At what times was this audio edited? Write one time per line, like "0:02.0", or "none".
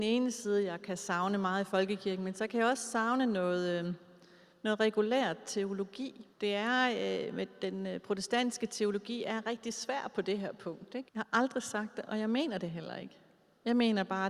0:06.3
0:11.1